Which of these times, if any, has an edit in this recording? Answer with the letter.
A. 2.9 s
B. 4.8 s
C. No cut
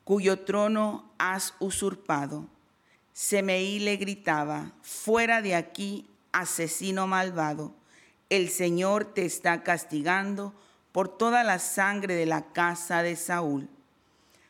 A